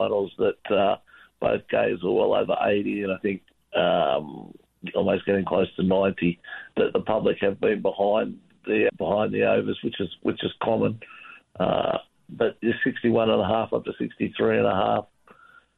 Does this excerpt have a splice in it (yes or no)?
yes